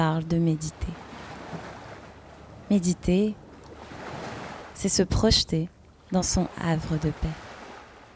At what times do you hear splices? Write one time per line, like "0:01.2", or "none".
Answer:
none